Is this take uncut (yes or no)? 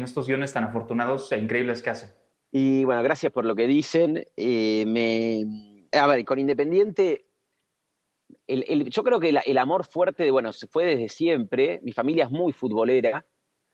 no